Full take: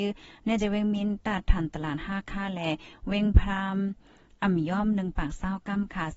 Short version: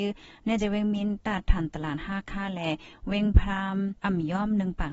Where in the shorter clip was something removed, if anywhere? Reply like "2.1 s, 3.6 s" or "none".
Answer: 4.0 s